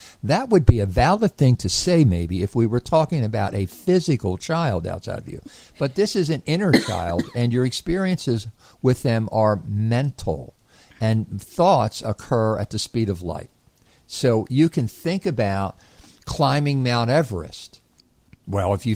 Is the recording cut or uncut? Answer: uncut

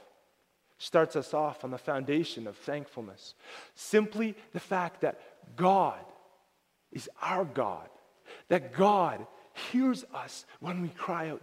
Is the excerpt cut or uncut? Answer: uncut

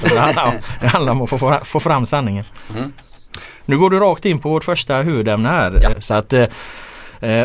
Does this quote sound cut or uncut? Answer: cut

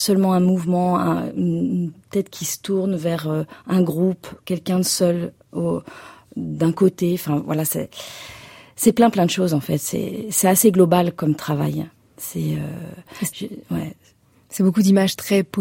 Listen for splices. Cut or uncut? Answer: uncut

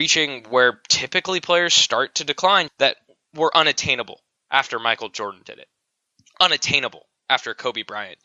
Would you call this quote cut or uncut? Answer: cut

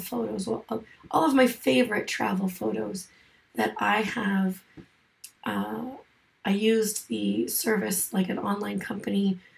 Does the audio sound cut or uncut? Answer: uncut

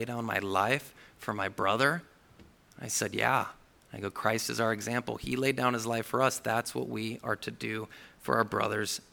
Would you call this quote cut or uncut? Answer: uncut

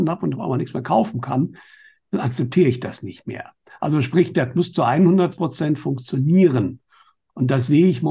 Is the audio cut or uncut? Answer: uncut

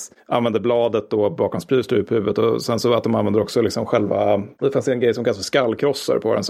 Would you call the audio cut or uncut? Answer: uncut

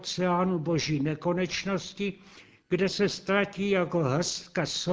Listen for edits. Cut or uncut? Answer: uncut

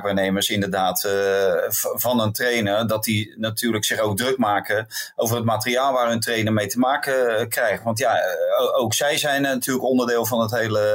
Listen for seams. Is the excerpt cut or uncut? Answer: uncut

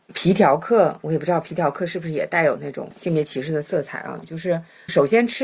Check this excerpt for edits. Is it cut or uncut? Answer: cut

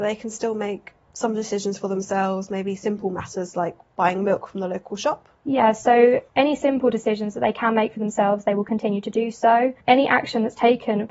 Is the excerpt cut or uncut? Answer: cut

